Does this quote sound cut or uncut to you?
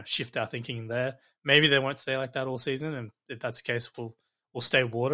uncut